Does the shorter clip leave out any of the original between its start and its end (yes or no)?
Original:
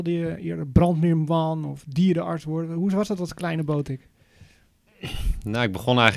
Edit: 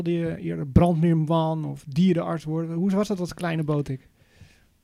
no